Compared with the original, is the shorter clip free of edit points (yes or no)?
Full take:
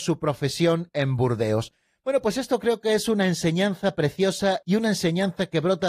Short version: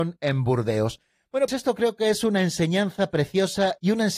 no